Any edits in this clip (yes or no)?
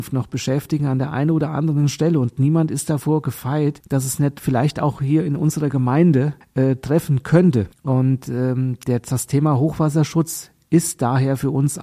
no